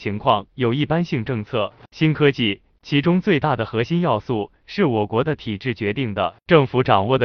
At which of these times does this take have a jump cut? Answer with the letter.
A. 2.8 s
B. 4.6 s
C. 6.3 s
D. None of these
A